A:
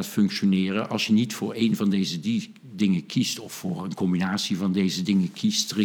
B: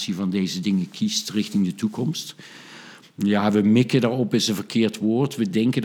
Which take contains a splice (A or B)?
B